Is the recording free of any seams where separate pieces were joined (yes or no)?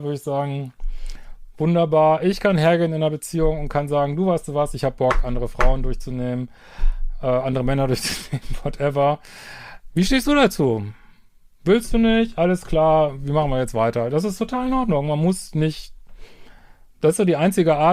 yes